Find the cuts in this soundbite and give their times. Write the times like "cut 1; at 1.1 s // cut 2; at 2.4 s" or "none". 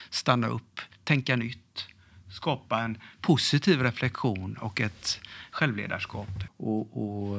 cut 1; at 6.5 s